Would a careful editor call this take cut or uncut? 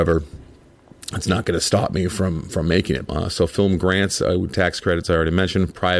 cut